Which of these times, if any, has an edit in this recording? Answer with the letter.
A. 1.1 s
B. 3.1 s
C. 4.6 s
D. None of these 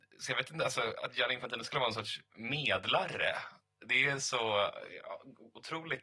D